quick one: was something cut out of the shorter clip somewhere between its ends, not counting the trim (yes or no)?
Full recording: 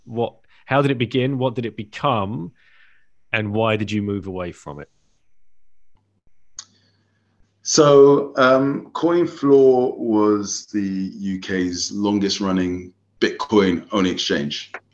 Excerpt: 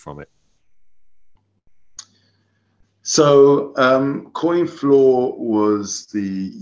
no